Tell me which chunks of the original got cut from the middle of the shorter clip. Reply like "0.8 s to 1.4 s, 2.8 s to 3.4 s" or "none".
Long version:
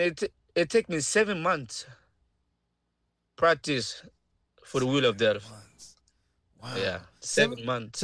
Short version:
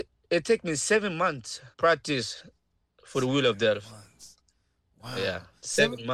2.0 s to 3.3 s